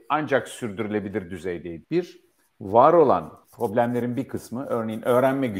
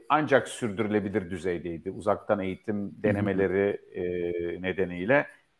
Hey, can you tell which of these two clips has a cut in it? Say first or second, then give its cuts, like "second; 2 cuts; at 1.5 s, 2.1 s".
first; 2 cuts; at 1.8 s, 3.4 s